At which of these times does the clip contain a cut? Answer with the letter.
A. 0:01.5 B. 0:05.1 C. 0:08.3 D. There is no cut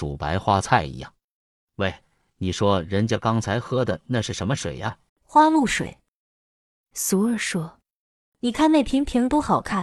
B